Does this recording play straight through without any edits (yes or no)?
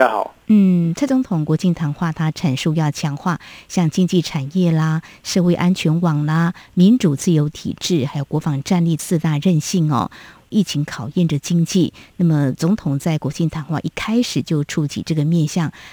yes